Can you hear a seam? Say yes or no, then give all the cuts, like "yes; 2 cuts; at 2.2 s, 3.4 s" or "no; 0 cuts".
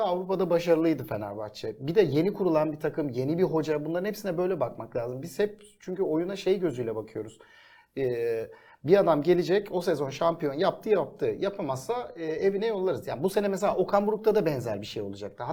no; 0 cuts